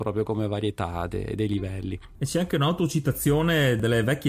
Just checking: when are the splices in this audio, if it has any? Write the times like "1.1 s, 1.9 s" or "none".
none